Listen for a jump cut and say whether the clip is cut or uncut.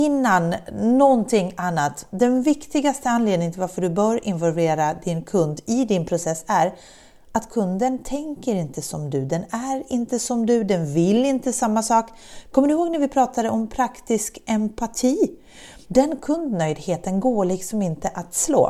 cut